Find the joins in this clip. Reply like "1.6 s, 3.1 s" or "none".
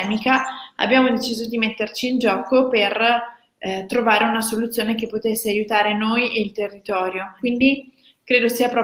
7.4 s